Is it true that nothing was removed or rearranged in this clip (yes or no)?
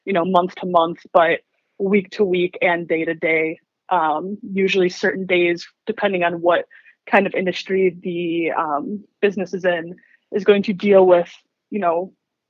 yes